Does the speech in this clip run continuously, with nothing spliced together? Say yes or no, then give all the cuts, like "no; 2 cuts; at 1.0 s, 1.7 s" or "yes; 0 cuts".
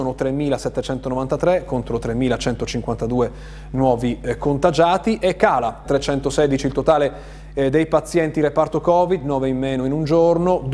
no; 1 cut; at 5.8 s